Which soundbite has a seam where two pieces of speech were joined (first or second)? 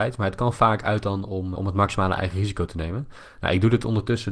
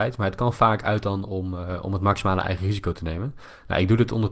first